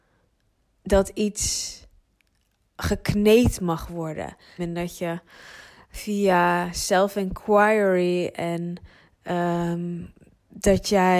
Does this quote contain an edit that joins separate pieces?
yes; 1 cut; at 4.6 s

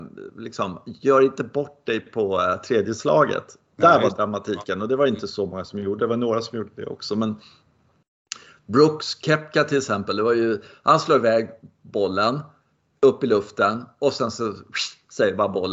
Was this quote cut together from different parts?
no; 0 cuts

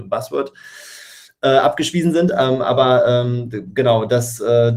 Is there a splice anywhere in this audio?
no; 0 cuts

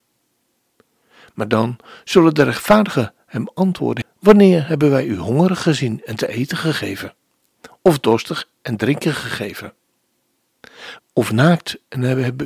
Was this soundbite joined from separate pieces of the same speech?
yes; 2 cuts; at 4.0 s, 11.0 s

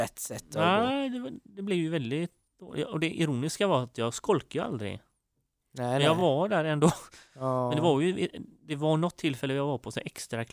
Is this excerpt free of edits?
yes; 0 cuts

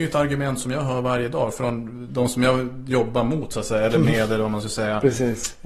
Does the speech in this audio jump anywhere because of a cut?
yes; 1 cut; at 2.1 s

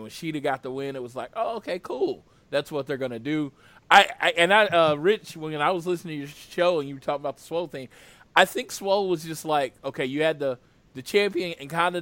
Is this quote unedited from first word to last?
yes; 0 cuts

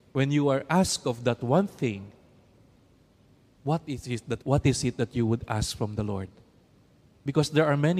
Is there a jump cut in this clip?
yes; 1 cut; at 4.4 s

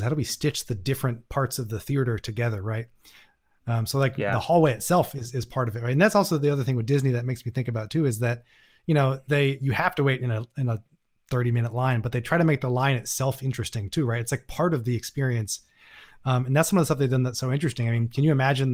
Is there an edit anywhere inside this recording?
no; 0 cuts

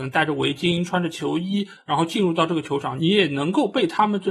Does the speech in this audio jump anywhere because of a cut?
yes; 2 cuts; at 1.8 s, 3.0 s

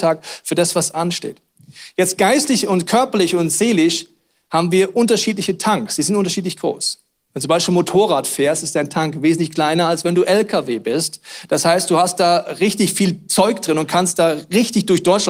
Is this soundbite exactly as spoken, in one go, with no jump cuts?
yes; 0 cuts

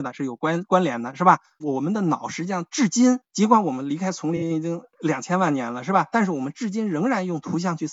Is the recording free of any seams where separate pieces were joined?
no; 1 cut; at 1.6 s

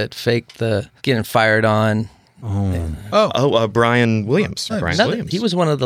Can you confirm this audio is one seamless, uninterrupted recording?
no; 2 cuts; at 1.0 s, 4.7 s

